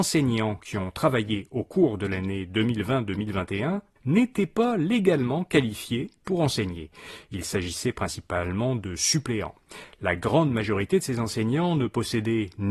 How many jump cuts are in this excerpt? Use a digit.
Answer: 1